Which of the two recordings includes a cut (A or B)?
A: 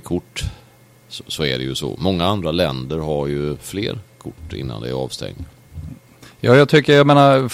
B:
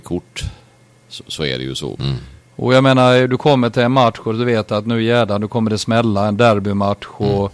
B